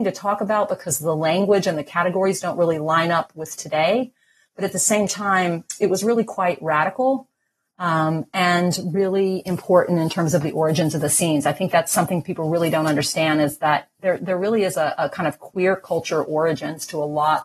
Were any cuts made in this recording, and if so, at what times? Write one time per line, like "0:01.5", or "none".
none